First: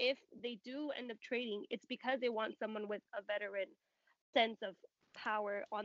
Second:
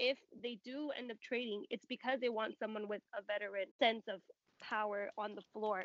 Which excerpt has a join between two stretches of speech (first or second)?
second